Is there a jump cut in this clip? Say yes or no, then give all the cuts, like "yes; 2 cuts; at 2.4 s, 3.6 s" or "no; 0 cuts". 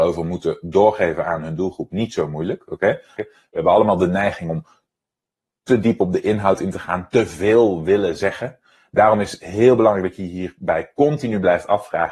yes; 1 cut; at 3.2 s